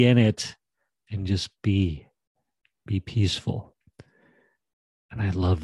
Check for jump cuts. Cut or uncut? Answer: uncut